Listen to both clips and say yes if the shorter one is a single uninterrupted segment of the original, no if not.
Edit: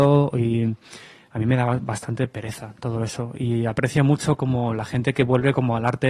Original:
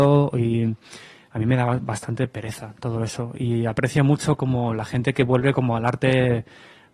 yes